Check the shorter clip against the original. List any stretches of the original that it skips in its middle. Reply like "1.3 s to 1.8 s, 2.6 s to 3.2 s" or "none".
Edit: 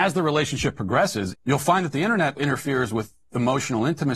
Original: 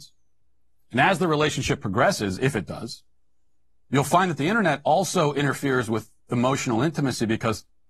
2.4 s to 3.8 s, 4.8 s to 5.3 s